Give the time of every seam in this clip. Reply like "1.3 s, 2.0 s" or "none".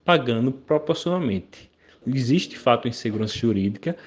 2.0 s